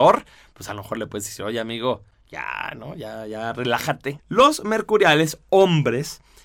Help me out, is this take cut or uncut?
cut